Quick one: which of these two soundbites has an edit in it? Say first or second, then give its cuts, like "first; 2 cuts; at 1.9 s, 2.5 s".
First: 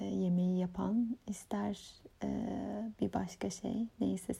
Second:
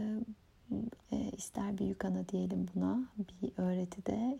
second; 1 cut; at 1.0 s